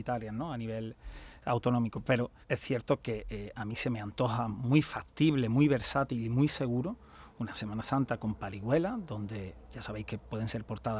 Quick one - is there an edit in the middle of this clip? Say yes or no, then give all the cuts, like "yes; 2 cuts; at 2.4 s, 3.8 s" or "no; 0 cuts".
yes; 1 cut; at 2.4 s